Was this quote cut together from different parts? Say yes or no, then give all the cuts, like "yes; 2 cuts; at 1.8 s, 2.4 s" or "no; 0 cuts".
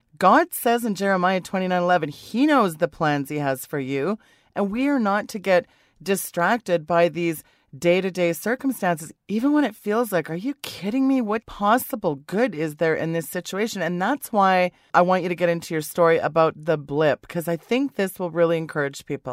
no; 0 cuts